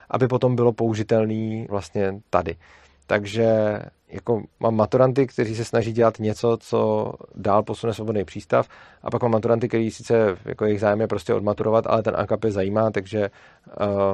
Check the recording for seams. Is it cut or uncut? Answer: cut